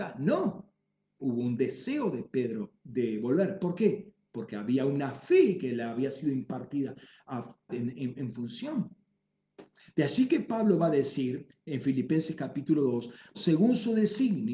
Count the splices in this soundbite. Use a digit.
3